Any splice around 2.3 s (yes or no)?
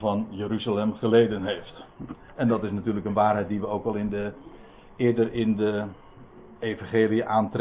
yes